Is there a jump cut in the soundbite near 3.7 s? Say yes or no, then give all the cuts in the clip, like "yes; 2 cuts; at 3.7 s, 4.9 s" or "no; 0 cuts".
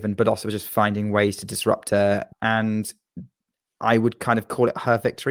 no; 1 cut; at 2.3 s